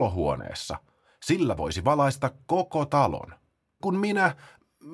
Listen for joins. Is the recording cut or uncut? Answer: cut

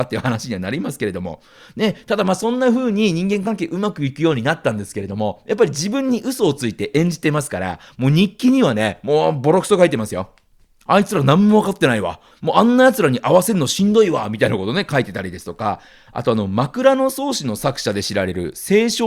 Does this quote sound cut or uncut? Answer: cut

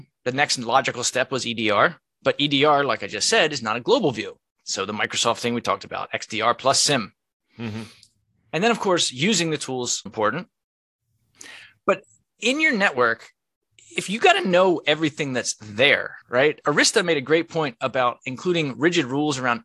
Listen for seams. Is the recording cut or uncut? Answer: cut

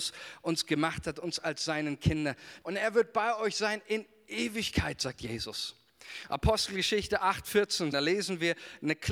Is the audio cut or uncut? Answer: cut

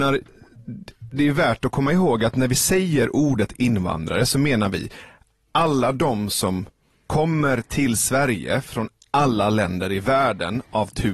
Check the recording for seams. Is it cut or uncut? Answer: uncut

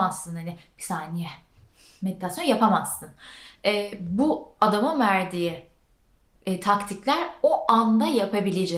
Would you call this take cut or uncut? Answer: uncut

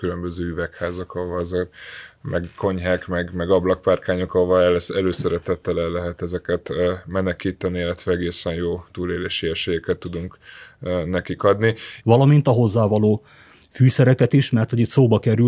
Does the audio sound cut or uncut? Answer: cut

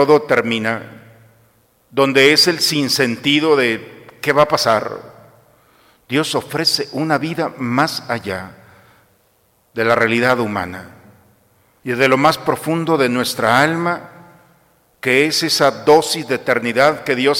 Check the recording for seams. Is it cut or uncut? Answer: cut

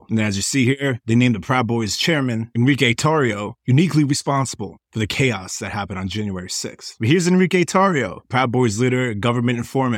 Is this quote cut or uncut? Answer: uncut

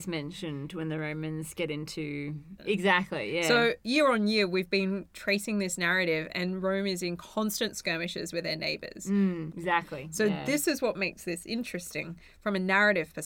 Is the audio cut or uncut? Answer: cut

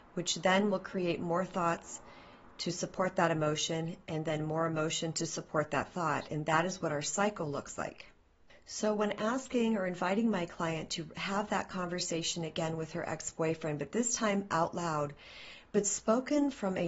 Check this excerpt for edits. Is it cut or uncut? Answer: uncut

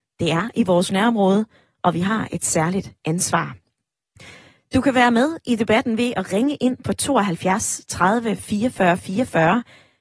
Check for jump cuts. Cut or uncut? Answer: uncut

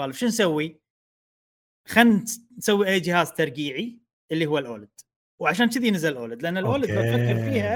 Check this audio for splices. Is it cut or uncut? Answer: uncut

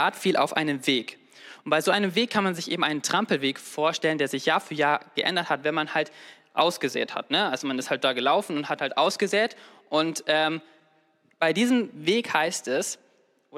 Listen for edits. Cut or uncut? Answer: uncut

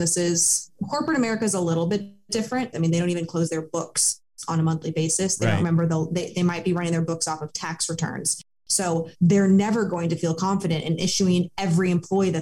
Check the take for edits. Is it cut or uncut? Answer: cut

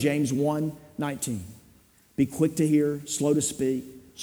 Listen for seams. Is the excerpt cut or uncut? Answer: uncut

